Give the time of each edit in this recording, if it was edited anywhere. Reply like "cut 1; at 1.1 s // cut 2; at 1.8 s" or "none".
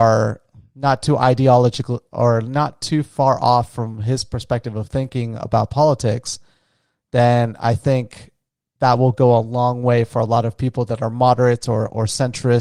none